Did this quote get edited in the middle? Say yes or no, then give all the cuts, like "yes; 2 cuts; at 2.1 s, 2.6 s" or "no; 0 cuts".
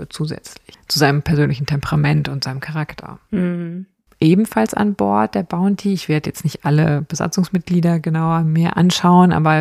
no; 0 cuts